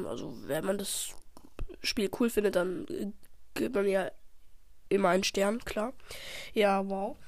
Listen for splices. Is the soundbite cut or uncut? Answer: uncut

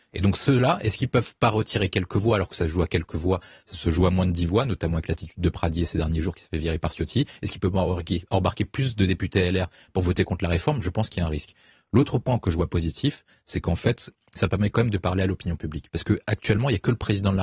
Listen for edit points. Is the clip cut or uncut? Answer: uncut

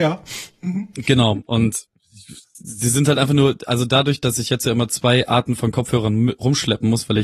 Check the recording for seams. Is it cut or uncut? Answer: uncut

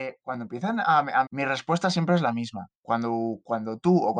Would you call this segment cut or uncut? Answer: cut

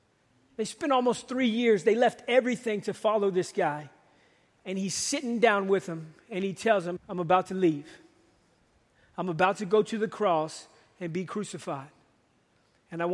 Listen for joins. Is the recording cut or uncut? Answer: cut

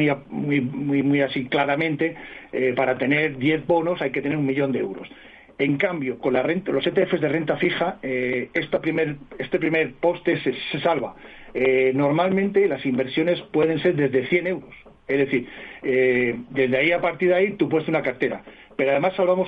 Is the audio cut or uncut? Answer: uncut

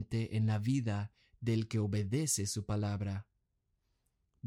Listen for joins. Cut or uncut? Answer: uncut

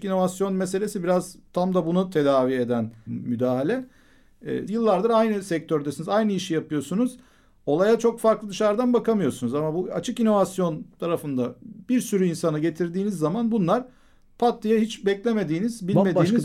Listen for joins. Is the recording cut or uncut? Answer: cut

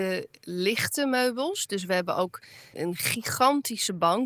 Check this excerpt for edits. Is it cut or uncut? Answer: cut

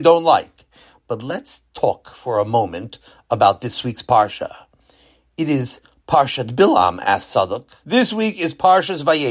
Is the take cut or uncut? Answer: cut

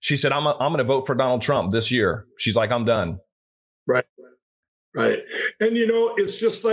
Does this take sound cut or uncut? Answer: uncut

